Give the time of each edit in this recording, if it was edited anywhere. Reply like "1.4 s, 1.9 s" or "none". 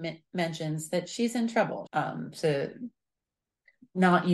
1.9 s